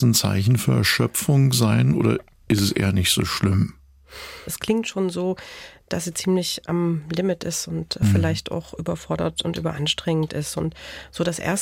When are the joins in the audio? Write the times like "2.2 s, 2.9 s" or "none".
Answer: 4.5 s